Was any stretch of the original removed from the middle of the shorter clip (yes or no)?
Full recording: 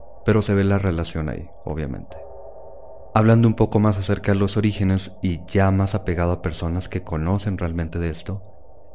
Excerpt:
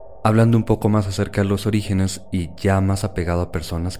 no